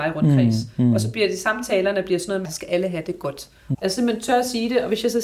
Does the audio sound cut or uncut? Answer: cut